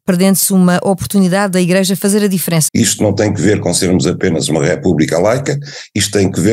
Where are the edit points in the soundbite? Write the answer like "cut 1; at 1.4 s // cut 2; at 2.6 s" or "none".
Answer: cut 1; at 2.7 s